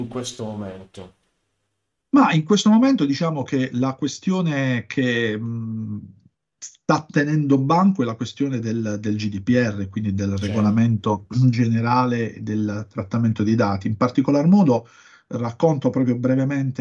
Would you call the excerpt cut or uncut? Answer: uncut